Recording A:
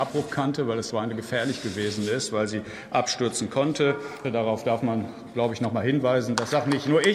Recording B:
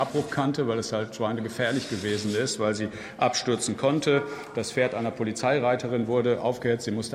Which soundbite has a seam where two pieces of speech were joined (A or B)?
A